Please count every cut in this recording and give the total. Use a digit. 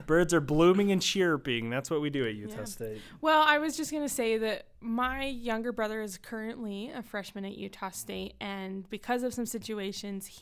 0